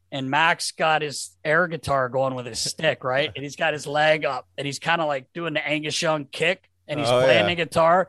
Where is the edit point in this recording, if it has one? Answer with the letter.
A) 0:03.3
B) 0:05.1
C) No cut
C